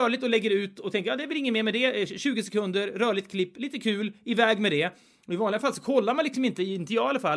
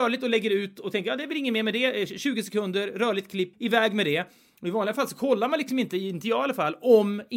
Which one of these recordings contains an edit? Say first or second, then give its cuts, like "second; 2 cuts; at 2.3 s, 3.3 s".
second; 1 cut; at 3.5 s